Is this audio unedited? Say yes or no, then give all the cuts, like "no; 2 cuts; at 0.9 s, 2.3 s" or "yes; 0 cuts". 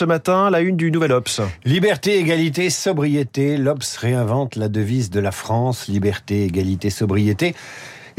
yes; 0 cuts